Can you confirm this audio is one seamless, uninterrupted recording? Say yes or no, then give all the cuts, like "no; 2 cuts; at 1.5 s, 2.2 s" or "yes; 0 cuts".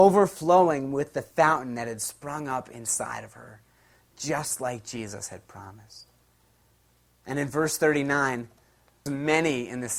no; 1 cut; at 9.1 s